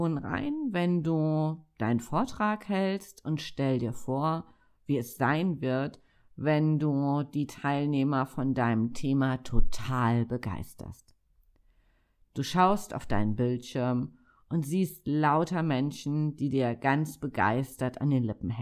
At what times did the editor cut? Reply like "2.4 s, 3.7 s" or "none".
none